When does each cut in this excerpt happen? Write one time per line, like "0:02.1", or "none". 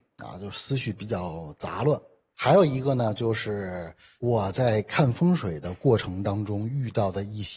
0:02.3